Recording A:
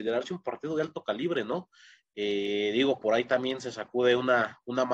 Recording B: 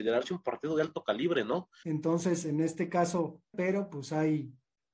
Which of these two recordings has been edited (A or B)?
B